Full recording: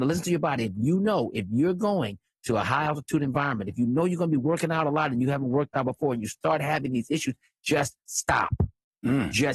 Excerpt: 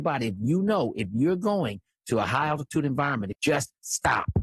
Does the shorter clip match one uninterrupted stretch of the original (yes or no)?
no